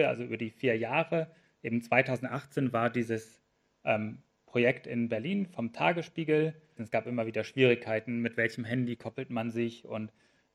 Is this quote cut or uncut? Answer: cut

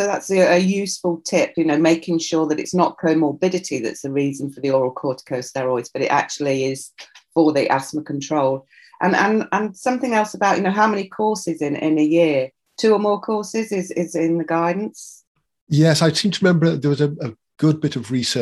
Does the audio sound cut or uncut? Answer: uncut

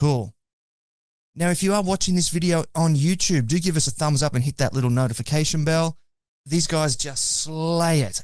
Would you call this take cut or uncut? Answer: cut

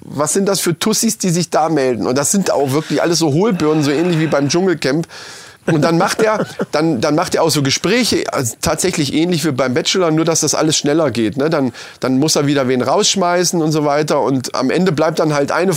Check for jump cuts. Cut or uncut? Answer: cut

